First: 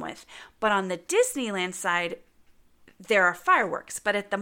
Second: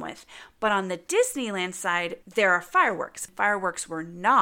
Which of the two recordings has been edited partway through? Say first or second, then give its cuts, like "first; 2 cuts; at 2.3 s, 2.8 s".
second; 2 cuts; at 2.2 s, 3.3 s